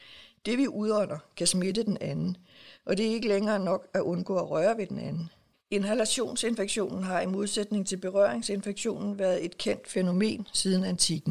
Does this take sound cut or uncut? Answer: cut